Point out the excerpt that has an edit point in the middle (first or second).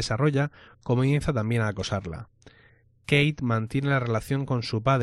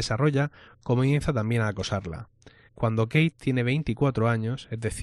second